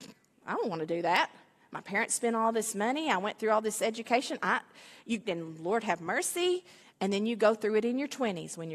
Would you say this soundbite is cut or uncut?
cut